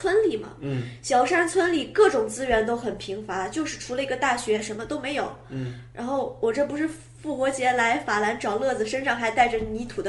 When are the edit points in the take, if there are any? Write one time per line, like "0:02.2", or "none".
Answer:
none